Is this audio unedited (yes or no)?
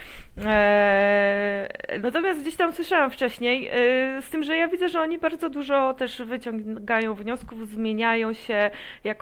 no